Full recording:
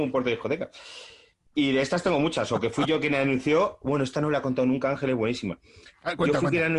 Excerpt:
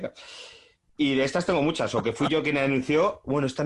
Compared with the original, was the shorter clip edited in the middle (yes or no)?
no